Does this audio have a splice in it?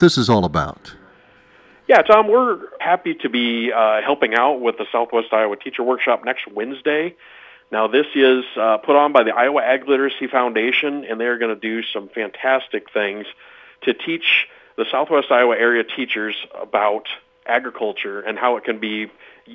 yes; 1 cut; at 2.8 s

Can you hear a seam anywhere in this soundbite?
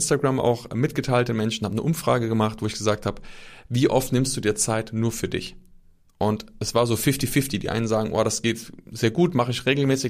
no; 0 cuts

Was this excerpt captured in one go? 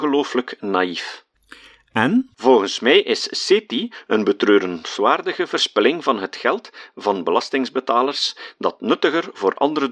yes; 0 cuts

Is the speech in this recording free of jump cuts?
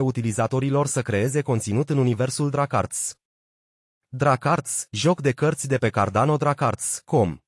yes; 0 cuts

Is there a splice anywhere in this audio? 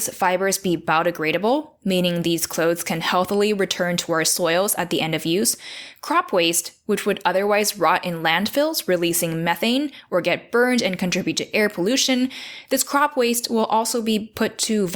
no; 0 cuts

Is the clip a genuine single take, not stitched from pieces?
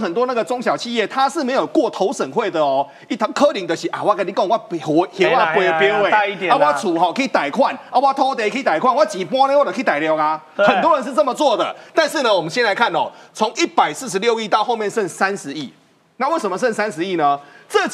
yes; 0 cuts

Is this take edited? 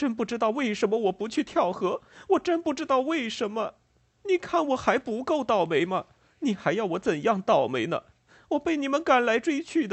yes; 1 cut; at 4.2 s

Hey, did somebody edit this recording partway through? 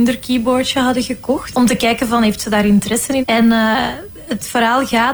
yes; 2 cuts; at 1.5 s, 3.2 s

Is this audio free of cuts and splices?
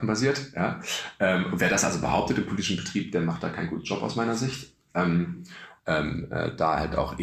no; 1 cut; at 5.8 s

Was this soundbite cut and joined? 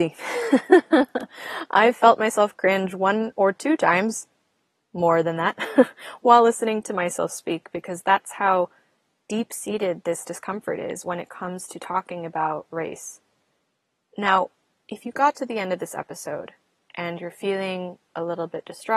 no; 0 cuts

